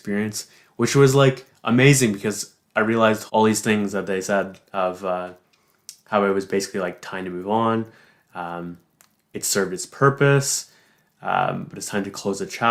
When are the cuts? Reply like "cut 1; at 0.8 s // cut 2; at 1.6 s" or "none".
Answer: cut 1; at 3.3 s